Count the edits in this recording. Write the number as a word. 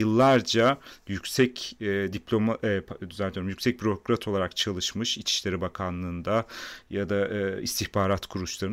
zero